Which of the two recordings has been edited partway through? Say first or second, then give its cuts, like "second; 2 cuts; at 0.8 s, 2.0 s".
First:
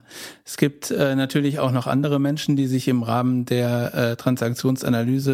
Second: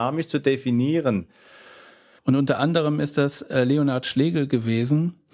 second; 1 cut; at 2.2 s